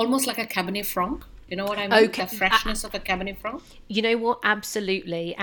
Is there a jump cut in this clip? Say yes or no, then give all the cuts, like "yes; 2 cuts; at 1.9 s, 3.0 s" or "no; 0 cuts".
no; 0 cuts